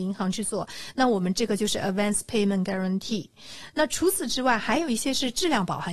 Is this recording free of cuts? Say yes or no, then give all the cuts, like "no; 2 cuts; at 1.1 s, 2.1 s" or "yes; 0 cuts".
yes; 0 cuts